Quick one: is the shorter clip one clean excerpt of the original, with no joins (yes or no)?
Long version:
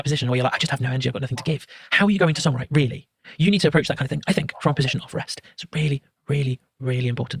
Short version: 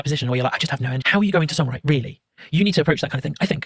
no